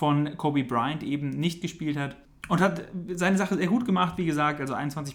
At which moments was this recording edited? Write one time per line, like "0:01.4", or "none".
none